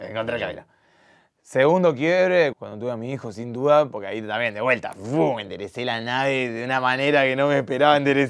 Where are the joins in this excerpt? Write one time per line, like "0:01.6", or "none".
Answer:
0:02.5